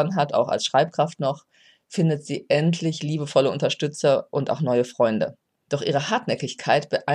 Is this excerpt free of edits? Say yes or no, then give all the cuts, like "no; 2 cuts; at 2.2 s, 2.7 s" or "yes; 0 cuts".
yes; 0 cuts